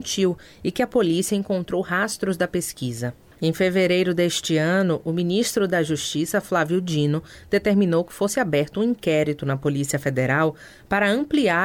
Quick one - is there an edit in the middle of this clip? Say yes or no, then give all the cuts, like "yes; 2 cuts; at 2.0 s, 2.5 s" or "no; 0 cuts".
yes; 1 cut; at 3.3 s